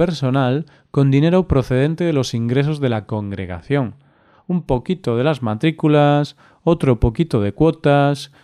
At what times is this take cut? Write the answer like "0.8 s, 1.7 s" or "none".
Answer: none

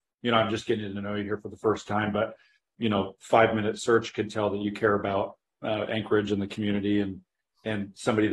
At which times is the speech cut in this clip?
none

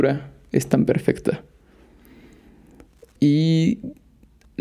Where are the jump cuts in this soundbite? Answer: 3.2 s

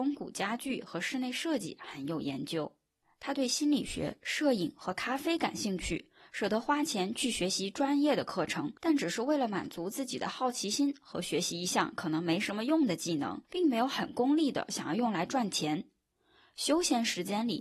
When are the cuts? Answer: 8.8 s, 13.4 s

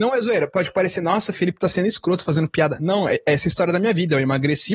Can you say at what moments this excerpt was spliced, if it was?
none

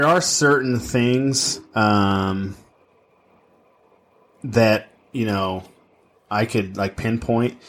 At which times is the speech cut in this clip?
none

